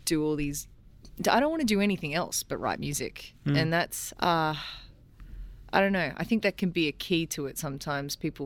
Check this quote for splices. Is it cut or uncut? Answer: cut